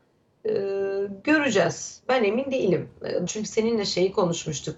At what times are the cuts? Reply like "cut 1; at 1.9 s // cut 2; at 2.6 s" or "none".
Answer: cut 1; at 3.3 s